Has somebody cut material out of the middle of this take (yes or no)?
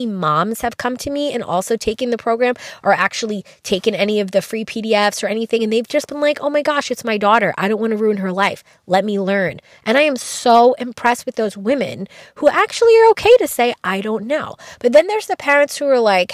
no